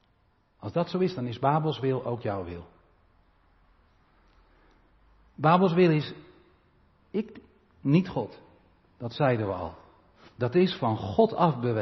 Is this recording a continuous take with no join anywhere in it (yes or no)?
yes